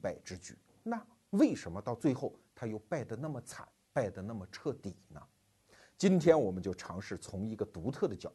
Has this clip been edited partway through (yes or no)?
no